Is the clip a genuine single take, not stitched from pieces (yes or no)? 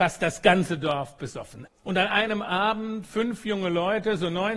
no